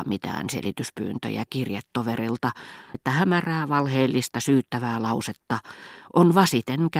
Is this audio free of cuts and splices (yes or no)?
no